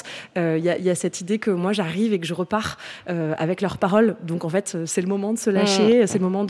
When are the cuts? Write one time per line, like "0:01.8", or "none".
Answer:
none